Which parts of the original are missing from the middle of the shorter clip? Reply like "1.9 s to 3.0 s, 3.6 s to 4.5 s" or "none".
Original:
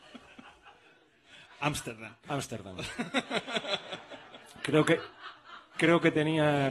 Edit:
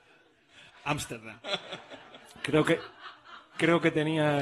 2.2 s to 3.6 s